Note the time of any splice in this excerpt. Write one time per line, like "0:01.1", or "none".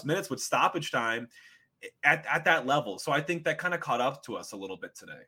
none